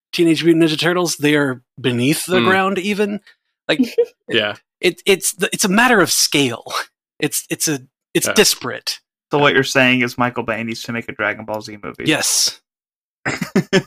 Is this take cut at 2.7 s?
no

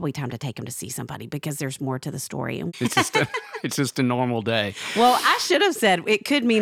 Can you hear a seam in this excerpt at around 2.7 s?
yes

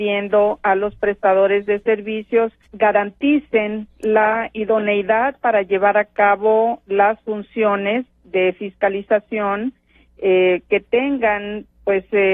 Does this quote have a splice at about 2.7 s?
yes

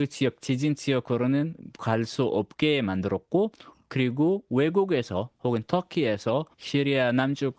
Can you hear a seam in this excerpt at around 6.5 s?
yes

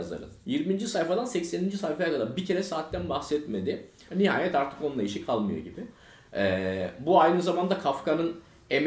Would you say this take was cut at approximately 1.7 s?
no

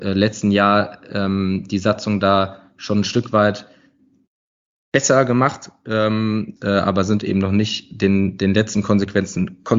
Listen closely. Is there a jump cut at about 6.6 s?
yes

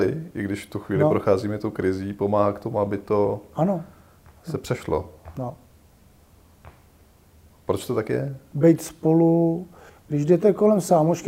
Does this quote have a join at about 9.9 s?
yes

